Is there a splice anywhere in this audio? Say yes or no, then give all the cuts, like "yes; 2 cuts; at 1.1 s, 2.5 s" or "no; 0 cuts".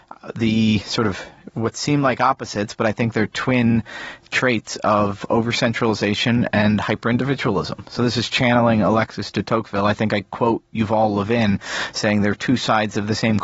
no; 0 cuts